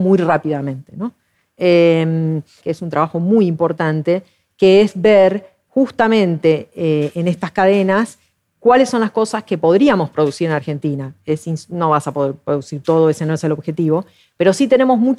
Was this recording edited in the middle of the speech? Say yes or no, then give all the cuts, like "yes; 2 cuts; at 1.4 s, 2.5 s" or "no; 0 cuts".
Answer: yes; 1 cut; at 2.6 s